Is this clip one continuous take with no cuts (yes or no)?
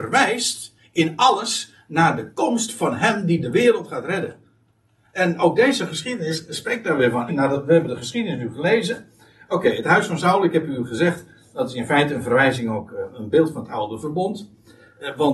no